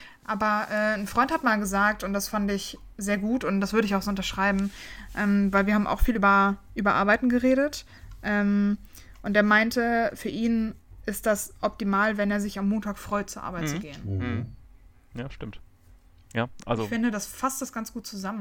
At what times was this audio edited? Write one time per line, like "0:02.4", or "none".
none

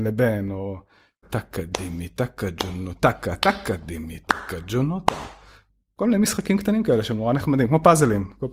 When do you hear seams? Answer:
0:01.2

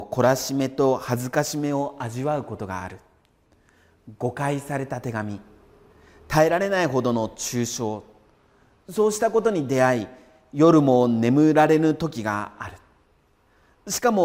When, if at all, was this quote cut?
none

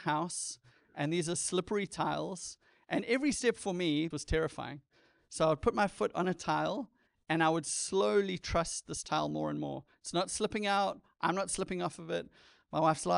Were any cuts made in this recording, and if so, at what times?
0:04.1

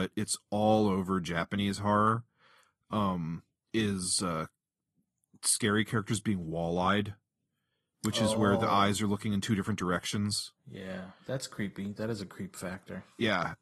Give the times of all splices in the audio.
none

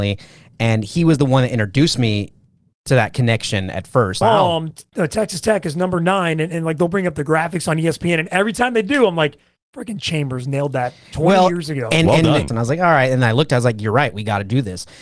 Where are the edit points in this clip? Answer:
0:04.2
0:12.5

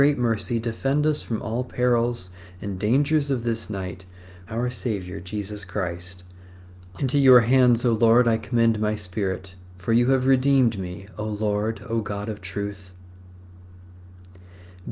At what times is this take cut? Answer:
0:04.5
0:07.0

